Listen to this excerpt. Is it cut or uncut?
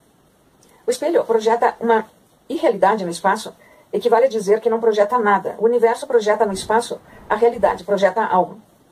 uncut